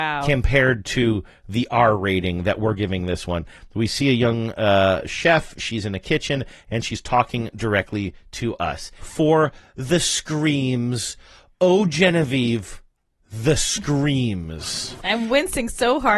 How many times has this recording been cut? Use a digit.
2